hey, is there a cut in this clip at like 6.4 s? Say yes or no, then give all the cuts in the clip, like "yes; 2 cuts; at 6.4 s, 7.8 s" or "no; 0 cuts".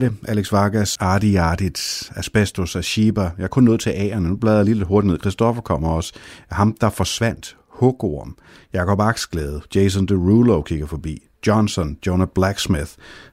no; 1 cut; at 1.0 s